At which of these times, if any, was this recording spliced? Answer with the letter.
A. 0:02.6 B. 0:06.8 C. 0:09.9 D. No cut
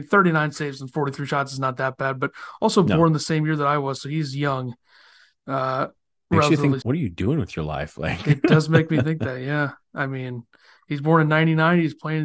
B